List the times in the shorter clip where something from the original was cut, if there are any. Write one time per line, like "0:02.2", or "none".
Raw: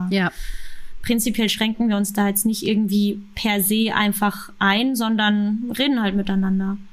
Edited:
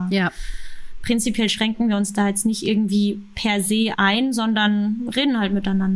0:03.9